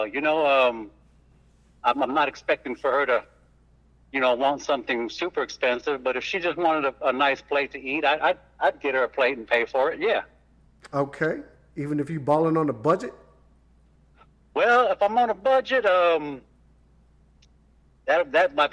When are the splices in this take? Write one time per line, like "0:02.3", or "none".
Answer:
none